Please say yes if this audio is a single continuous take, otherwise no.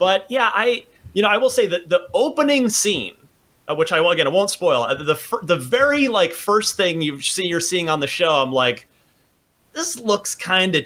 yes